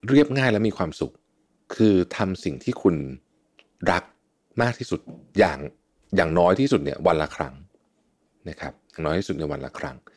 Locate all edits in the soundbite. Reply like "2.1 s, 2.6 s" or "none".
none